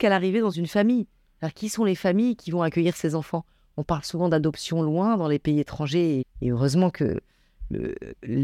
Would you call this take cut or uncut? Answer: cut